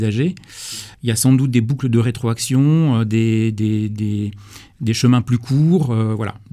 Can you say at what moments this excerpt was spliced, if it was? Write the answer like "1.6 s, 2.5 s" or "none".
0.9 s